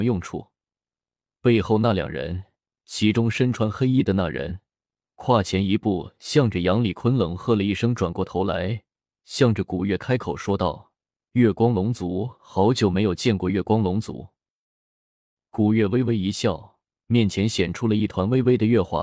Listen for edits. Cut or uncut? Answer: cut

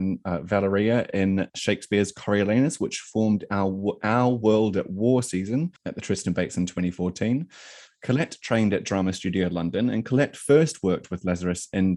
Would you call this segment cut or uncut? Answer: cut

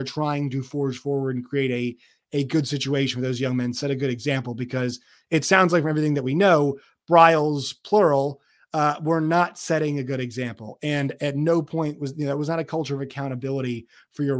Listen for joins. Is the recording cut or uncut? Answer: uncut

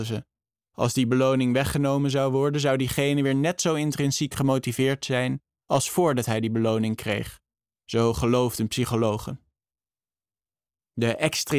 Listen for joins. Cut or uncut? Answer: uncut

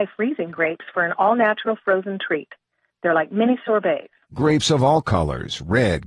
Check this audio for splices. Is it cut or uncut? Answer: cut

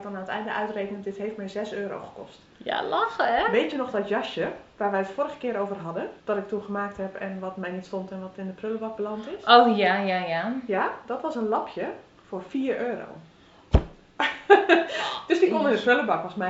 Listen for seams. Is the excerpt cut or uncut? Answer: cut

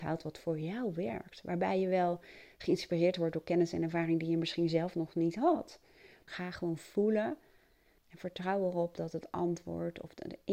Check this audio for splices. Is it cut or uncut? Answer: cut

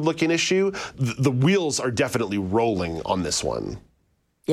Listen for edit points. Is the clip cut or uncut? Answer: cut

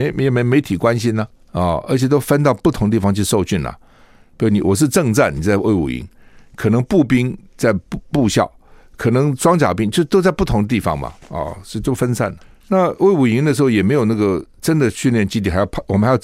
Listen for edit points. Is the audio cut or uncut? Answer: uncut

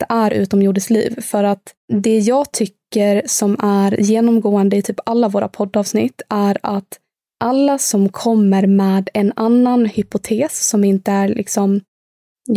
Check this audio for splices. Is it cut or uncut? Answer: cut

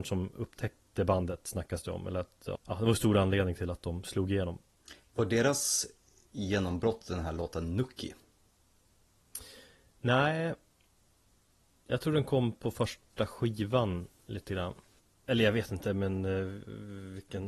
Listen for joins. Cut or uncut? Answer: cut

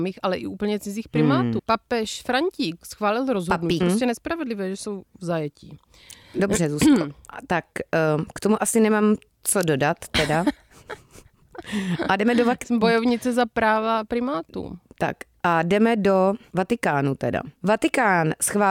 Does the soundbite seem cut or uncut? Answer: cut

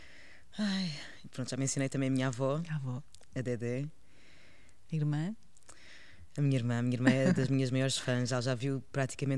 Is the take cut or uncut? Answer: cut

